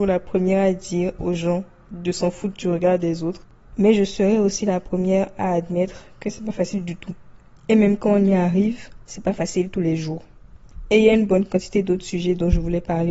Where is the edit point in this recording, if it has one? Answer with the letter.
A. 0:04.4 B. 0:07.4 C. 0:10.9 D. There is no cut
D